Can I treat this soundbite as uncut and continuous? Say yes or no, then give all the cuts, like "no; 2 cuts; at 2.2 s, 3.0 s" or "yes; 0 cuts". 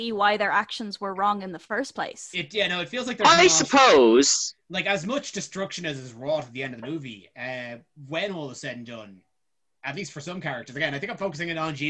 yes; 0 cuts